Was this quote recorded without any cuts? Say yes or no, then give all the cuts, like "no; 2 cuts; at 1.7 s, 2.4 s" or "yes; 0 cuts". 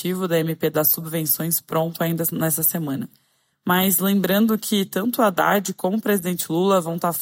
yes; 0 cuts